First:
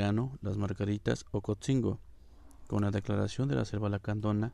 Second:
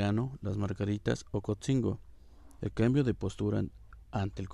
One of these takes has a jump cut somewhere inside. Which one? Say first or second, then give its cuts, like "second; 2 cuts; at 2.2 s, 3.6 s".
second; 1 cut; at 2.6 s